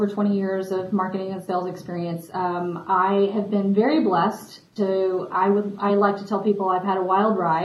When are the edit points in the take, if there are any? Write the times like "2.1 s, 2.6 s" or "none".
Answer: none